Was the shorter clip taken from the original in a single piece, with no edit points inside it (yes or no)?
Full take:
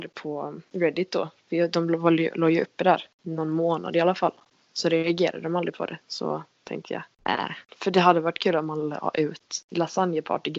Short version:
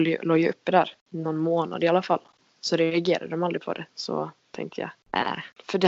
yes